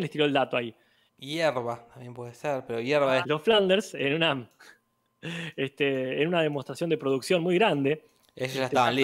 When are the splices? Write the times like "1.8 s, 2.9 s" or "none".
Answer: 1.1 s, 3.2 s